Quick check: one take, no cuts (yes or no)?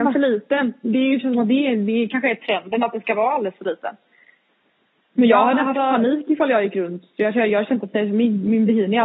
yes